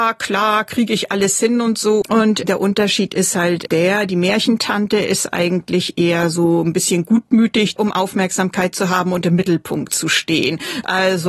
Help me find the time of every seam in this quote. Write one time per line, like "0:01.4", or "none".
0:02.0
0:07.8